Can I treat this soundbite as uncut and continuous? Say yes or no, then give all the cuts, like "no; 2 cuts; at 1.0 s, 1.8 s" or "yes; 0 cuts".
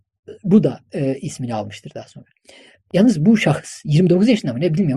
no; 1 cut; at 2.9 s